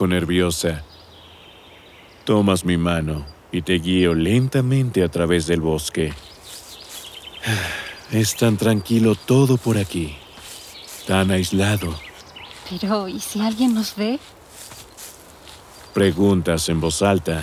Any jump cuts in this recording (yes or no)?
no